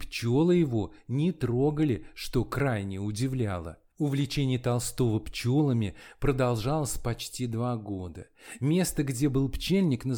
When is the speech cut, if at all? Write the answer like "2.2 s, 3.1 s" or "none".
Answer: none

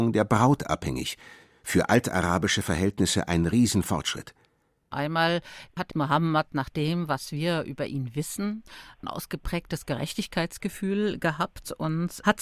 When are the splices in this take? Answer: 4.9 s

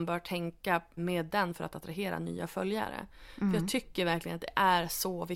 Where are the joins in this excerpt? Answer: 1.0 s

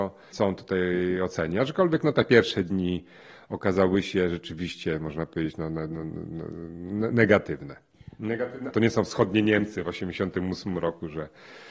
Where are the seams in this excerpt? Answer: 8.7 s

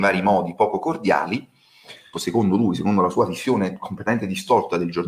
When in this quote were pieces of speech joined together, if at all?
2.1 s

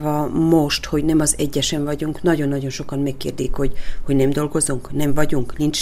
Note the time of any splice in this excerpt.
none

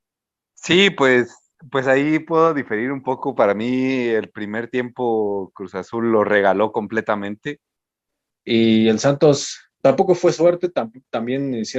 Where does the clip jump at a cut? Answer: 8.3 s, 9.8 s

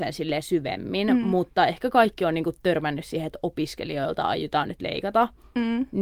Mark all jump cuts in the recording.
none

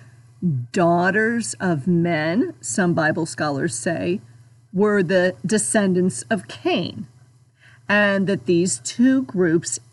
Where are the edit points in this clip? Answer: none

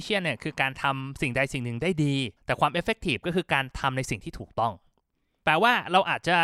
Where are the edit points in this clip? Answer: 2.4 s

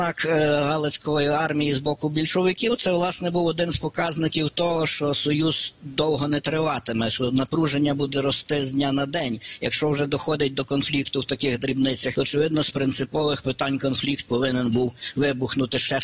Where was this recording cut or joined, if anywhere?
12.1 s

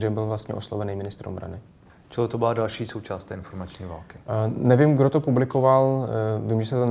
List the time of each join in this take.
1.9 s

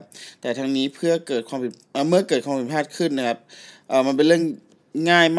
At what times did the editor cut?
none

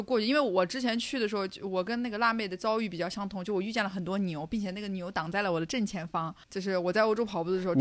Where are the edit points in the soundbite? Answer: 6.4 s

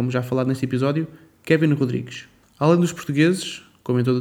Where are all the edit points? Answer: none

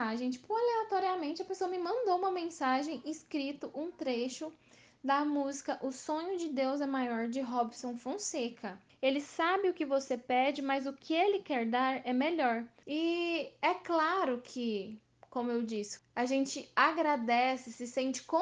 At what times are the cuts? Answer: 8.9 s, 12.8 s, 16.0 s

